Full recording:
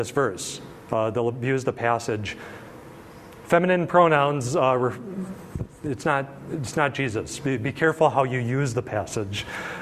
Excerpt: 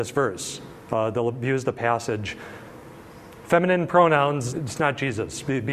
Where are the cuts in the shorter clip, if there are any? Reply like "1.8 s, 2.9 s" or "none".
4.5 s